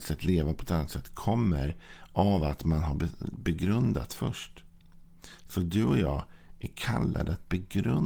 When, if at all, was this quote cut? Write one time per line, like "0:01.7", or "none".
none